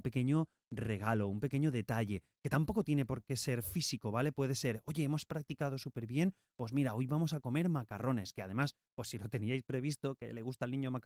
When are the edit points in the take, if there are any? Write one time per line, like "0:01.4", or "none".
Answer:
none